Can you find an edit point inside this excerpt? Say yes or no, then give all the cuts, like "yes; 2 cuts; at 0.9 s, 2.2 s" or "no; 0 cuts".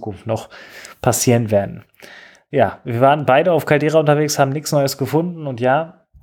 no; 0 cuts